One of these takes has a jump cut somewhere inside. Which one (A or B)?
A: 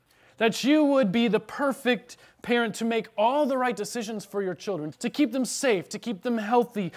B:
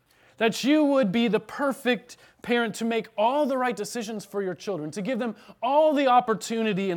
A